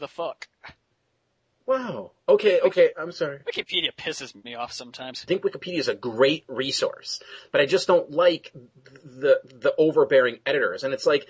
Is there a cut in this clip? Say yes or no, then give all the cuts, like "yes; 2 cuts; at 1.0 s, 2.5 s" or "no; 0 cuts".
no; 0 cuts